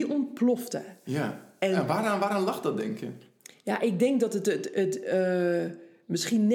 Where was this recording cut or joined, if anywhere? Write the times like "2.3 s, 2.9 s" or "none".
none